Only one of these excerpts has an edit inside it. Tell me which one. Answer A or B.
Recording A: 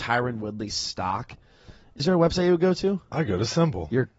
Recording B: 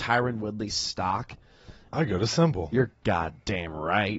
B